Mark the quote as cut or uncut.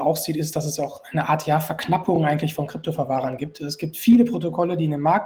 uncut